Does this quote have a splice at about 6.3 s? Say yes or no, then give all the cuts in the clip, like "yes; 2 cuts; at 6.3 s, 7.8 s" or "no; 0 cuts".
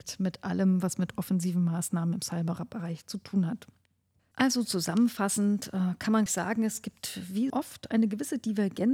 yes; 2 cuts; at 6.3 s, 7.5 s